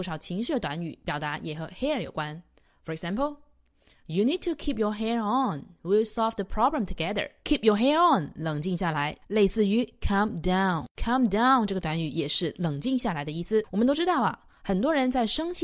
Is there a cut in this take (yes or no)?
yes